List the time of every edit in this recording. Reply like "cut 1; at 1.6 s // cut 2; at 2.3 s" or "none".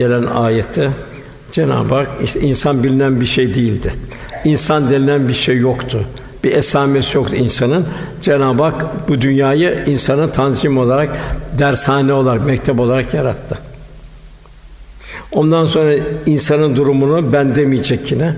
none